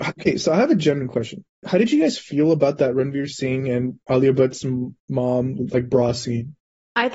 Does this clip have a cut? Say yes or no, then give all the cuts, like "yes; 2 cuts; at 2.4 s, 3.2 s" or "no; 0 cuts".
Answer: no; 0 cuts